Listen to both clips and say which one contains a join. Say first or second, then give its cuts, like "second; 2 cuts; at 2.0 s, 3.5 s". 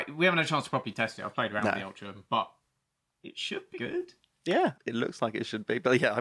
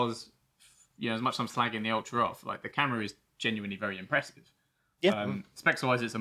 first; 2 cuts; at 3.7 s, 4.7 s